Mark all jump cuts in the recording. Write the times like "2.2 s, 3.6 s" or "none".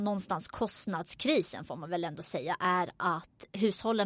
none